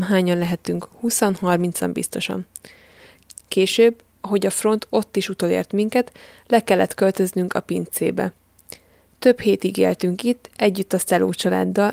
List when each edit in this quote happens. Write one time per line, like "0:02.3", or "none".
none